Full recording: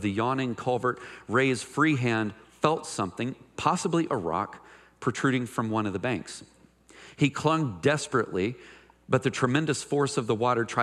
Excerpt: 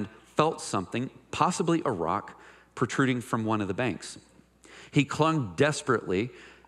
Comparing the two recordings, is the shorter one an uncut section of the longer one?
yes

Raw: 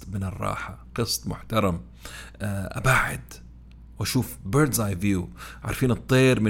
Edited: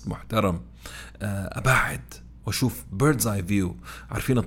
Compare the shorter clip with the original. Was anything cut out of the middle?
yes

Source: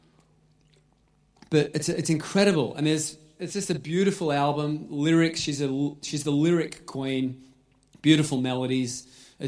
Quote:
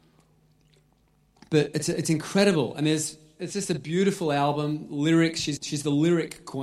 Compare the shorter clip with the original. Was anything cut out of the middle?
yes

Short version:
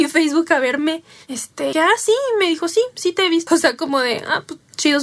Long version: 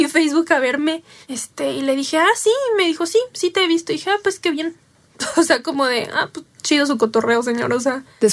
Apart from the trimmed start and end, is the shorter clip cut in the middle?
yes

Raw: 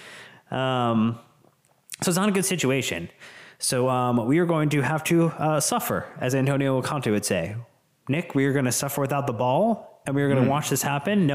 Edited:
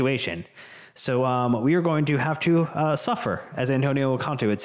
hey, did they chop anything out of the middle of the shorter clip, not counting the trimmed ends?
no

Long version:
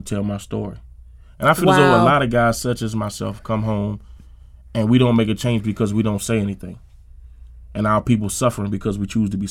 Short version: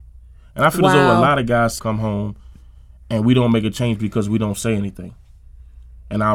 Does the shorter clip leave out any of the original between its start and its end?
yes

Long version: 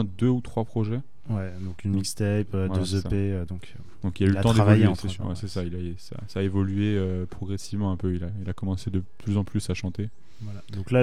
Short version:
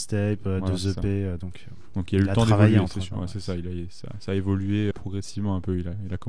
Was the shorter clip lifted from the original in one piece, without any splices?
no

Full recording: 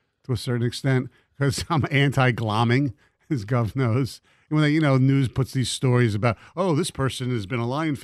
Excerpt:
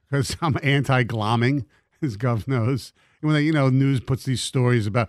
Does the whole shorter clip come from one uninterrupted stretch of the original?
yes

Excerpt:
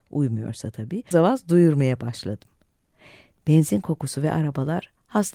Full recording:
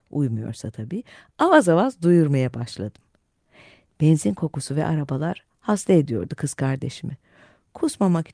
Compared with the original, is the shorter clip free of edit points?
no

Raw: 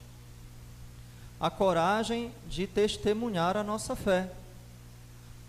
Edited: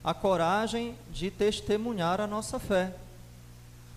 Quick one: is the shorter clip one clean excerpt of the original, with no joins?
yes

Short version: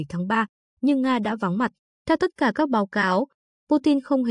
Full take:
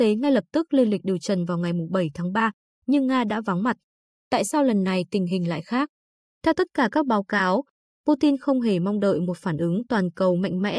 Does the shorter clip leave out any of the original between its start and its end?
yes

